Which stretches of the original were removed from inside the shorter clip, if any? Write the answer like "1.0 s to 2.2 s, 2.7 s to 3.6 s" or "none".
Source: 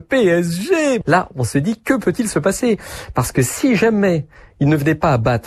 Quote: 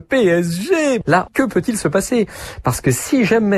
1.3 s to 1.8 s